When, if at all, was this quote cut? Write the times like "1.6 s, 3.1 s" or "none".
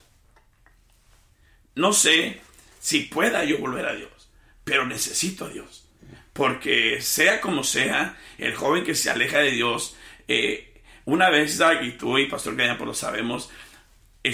none